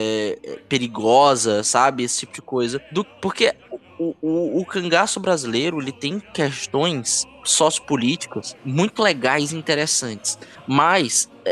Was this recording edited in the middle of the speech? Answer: no; 0 cuts

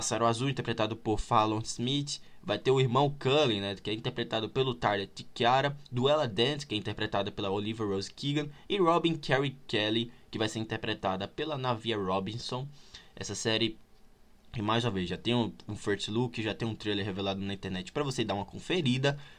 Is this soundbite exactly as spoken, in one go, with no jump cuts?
yes; 0 cuts

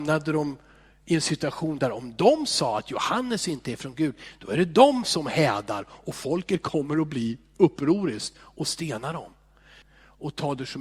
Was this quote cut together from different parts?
yes; 1 cut; at 9.8 s

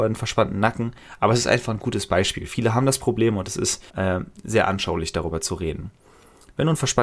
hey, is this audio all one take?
no; 1 cut; at 3.9 s

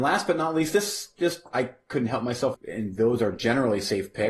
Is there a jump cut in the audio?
yes; 1 cut; at 2.5 s

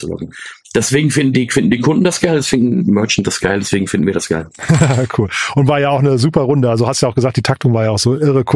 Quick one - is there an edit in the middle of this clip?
no; 0 cuts

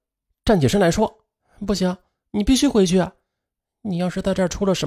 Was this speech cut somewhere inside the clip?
no; 0 cuts

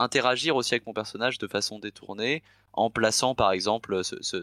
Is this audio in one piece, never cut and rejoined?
yes; 0 cuts

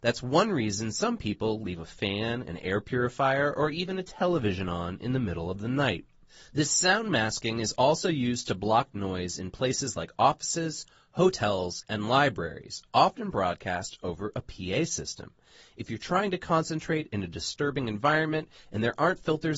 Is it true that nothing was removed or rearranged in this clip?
yes; 0 cuts

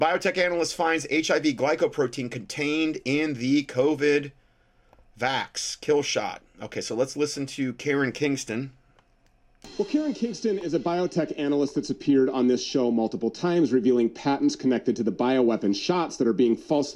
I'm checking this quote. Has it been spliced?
no; 0 cuts

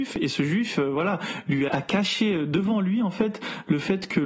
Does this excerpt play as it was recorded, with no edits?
no; 1 cut; at 1.7 s

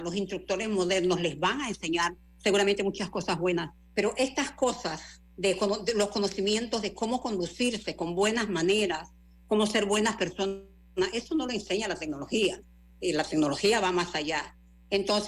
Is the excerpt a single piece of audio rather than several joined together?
yes; 0 cuts

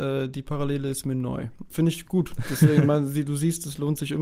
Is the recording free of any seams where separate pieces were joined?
no; 1 cut; at 1.7 s

